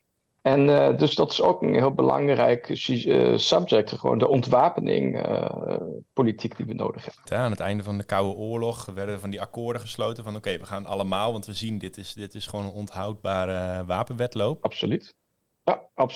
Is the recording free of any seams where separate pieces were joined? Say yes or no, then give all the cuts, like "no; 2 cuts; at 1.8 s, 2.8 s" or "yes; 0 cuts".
no; 2 cuts; at 7.2 s, 14.6 s